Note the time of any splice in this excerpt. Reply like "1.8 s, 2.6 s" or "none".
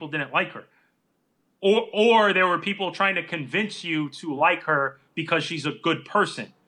none